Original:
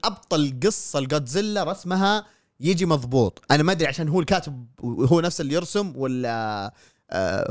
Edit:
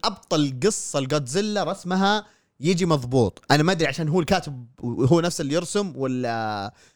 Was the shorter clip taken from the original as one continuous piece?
yes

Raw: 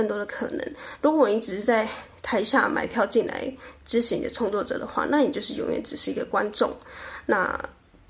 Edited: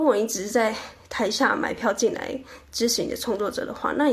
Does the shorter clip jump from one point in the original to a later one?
no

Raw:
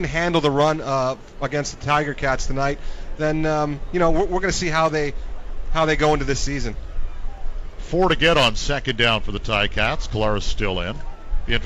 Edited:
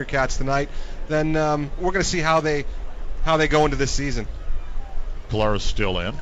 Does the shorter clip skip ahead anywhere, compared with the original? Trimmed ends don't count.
yes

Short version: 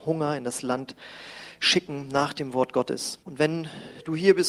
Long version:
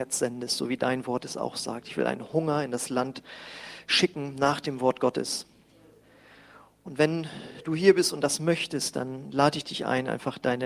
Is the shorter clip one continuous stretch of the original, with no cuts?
no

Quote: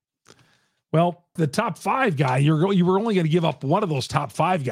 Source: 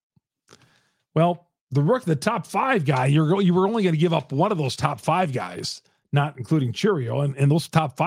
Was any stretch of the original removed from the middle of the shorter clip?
yes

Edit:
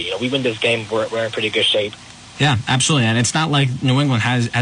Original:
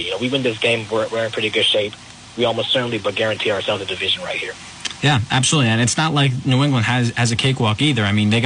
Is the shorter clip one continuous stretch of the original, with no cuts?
no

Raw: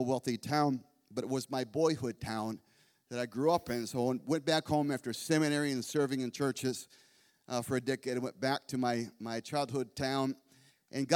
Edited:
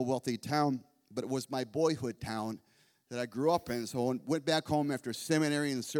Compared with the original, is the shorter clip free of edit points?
yes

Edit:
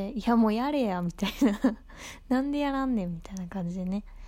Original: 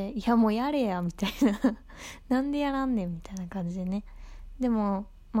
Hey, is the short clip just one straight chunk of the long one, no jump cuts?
yes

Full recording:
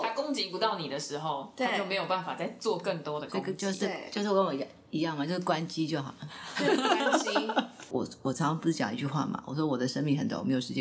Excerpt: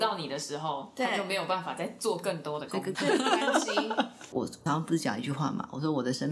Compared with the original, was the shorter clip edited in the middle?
yes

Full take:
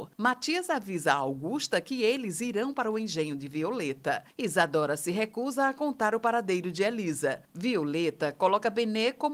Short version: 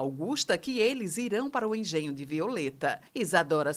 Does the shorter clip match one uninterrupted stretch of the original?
yes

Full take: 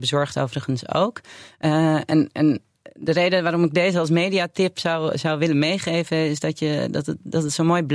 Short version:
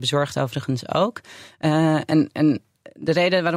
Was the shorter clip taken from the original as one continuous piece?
yes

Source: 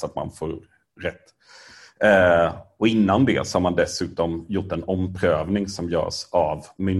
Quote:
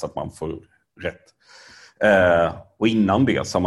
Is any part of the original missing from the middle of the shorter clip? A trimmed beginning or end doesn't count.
no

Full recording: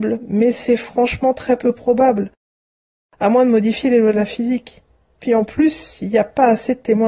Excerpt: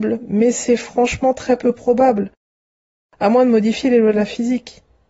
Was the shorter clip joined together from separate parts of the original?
no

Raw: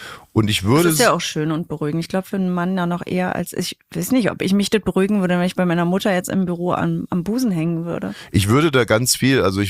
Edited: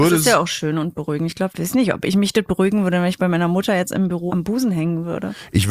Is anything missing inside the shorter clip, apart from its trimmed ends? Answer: yes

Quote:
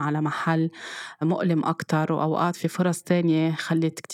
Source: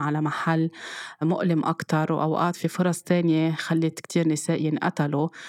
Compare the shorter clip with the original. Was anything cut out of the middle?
no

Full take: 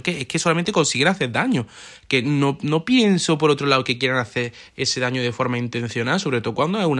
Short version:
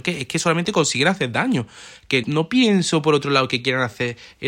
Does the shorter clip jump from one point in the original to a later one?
yes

